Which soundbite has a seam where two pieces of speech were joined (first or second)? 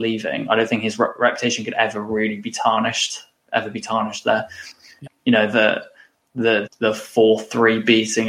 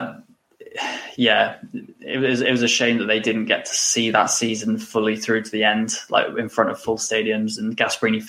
first